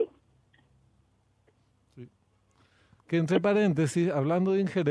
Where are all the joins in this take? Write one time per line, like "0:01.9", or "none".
0:03.0